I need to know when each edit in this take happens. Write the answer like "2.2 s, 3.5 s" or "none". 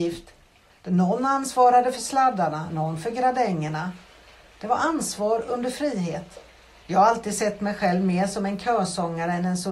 2.7 s, 6.8 s